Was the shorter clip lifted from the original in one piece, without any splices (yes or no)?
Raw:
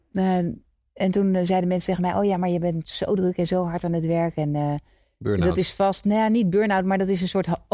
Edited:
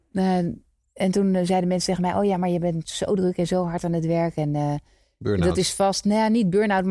yes